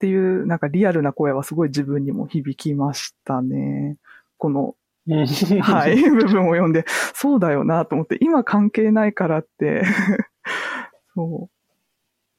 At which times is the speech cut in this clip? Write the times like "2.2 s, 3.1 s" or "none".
4.4 s